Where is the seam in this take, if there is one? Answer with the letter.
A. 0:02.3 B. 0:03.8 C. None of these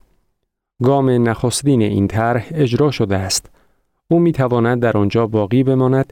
C